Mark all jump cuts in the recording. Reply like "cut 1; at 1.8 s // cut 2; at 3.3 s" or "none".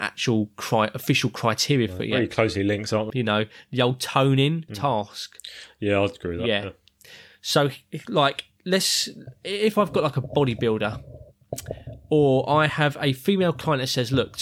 cut 1; at 3.1 s // cut 2; at 4.7 s